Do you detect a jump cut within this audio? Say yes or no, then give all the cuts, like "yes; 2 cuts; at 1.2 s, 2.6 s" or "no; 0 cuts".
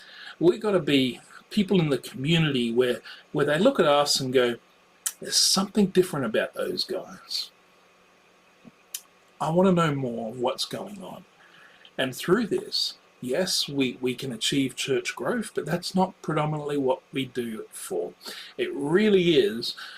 no; 0 cuts